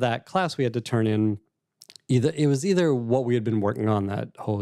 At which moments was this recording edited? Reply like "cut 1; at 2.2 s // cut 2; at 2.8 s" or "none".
none